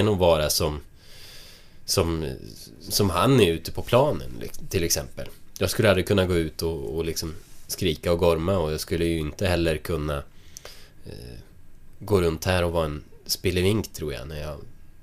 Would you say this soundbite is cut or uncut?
cut